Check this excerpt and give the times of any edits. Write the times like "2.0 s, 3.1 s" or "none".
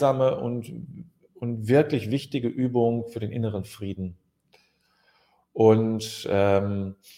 none